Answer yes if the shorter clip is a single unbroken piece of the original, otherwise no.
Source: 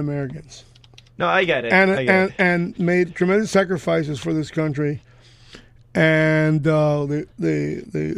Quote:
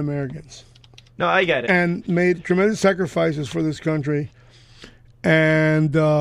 no